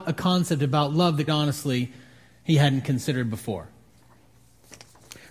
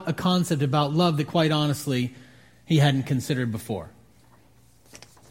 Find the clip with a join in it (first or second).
first